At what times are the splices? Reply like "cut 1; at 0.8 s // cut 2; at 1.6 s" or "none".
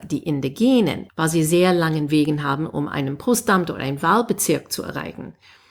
cut 1; at 1.1 s